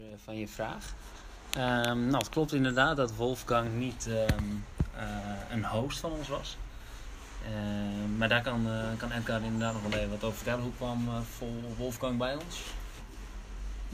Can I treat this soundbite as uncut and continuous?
yes; 0 cuts

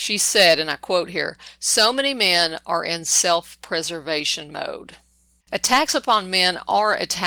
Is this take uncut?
no; 1 cut; at 5.4 s

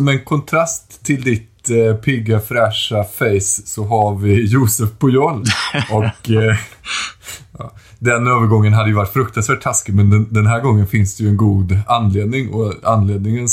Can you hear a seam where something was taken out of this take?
no; 0 cuts

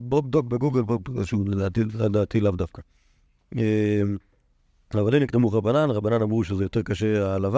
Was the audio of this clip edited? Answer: no; 0 cuts

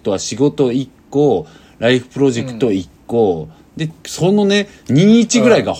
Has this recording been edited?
yes; 1 cut; at 3.9 s

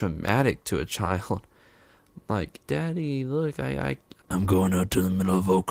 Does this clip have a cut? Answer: yes; 2 cuts; at 2.7 s, 4.2 s

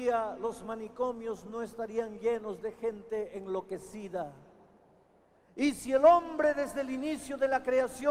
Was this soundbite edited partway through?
yes; 1 cut; at 5.3 s

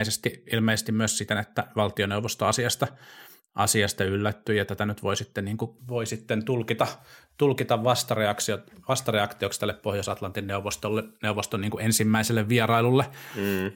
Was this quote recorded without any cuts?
yes; 0 cuts

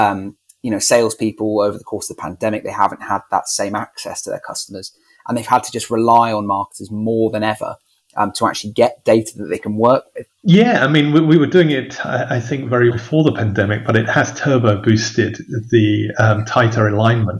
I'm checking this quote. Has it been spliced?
yes; 2 cuts; at 10.3 s, 12.9 s

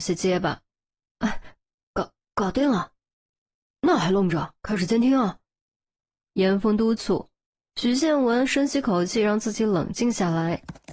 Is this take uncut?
yes; 0 cuts

